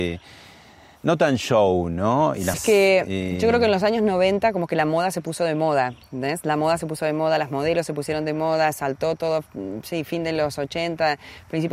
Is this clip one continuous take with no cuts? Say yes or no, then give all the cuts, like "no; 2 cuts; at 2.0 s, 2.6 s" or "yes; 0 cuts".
no; 1 cut; at 2.5 s